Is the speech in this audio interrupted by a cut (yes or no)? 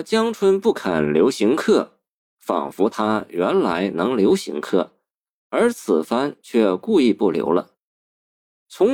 no